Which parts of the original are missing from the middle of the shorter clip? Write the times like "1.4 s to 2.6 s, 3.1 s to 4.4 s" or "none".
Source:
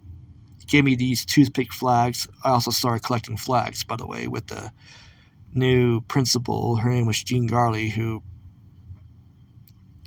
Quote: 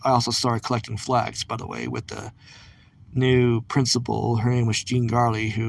none